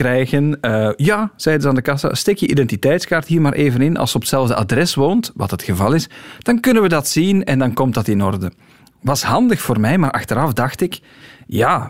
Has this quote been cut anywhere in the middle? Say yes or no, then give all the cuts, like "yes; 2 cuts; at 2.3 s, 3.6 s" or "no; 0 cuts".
no; 0 cuts